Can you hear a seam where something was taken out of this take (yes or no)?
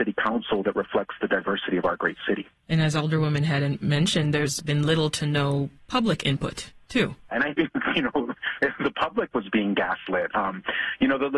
yes